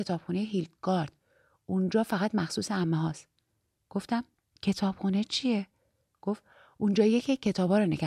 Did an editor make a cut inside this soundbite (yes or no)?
no